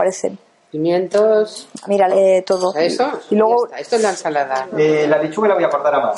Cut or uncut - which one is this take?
cut